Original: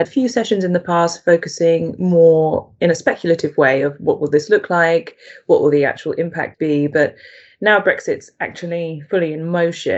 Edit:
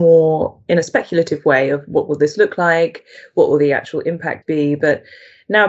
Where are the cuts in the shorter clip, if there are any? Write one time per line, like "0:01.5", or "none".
none